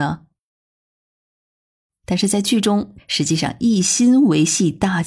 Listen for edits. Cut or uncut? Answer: cut